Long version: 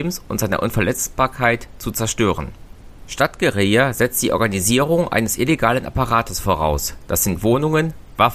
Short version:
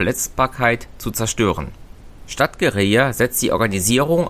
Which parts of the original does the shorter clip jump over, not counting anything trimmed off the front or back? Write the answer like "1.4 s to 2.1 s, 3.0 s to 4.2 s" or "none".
none